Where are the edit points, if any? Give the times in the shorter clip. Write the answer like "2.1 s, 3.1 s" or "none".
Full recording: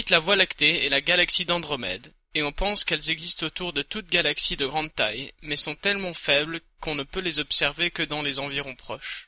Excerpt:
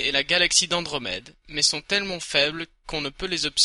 1.4 s